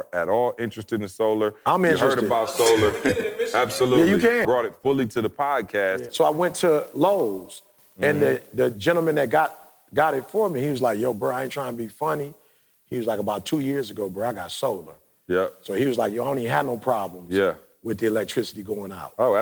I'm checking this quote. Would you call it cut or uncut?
cut